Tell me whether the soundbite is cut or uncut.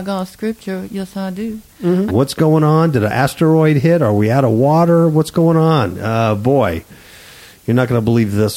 cut